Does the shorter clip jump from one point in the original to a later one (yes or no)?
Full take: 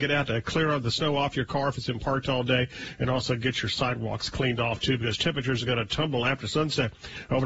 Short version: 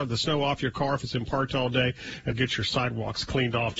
yes